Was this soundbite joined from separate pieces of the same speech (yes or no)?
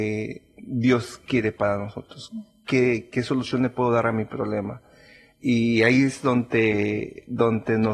no